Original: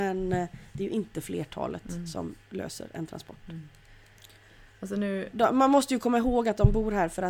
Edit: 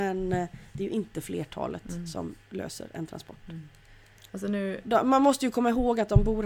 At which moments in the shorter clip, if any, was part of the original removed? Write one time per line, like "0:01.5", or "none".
0:04.3